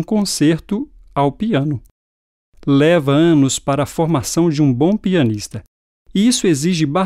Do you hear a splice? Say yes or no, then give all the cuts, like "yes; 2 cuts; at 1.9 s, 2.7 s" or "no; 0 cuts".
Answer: no; 0 cuts